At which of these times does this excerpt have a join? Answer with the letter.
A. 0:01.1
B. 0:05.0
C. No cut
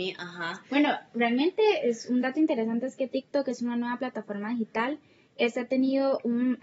C